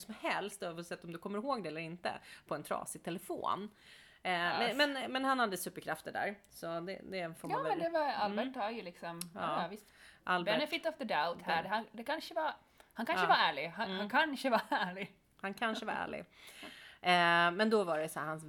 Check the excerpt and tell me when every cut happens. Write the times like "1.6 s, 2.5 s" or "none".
none